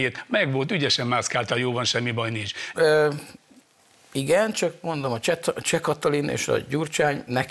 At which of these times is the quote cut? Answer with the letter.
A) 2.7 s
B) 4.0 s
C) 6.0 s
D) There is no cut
A